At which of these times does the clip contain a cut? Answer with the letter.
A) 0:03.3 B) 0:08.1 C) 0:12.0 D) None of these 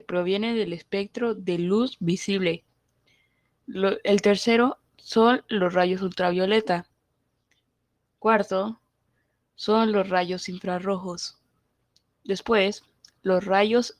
D